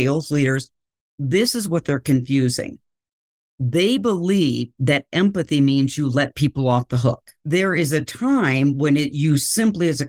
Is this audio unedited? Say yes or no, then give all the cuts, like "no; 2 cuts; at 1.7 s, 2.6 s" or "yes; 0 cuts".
yes; 0 cuts